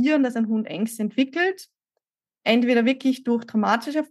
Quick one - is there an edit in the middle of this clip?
no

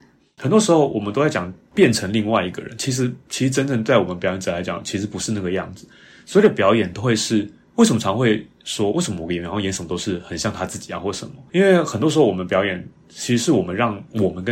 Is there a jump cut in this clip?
no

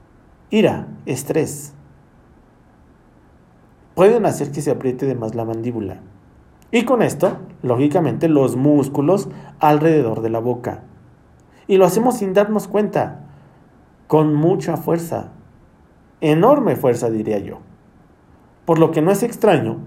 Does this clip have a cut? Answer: no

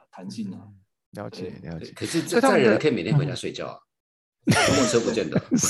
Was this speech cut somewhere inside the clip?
no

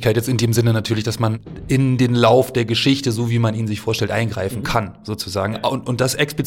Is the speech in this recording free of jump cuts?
yes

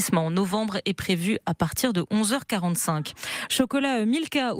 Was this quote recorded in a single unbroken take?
no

